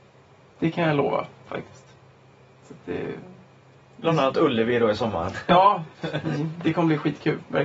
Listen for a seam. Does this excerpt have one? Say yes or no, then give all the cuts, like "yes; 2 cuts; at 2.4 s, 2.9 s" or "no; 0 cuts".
no; 0 cuts